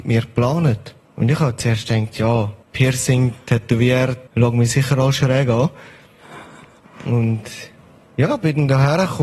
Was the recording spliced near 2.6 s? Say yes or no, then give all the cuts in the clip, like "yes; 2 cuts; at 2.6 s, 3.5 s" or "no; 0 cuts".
yes; 3 cuts; at 1.1 s, 2.6 s, 4.3 s